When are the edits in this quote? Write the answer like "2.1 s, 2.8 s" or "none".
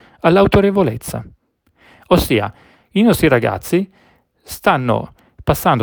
none